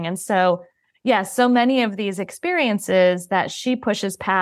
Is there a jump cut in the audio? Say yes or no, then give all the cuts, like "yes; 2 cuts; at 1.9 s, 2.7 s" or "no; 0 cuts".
no; 0 cuts